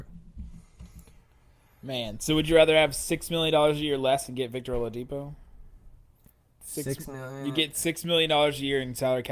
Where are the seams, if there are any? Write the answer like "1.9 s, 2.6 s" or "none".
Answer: none